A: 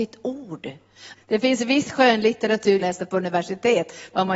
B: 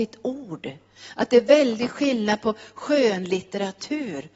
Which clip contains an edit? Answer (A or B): A